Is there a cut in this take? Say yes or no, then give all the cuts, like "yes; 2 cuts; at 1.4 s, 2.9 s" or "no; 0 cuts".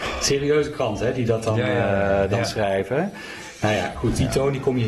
no; 0 cuts